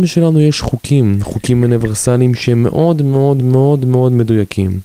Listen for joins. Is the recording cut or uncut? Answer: cut